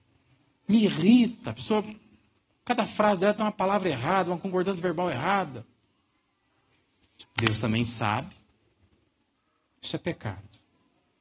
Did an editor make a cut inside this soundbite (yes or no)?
yes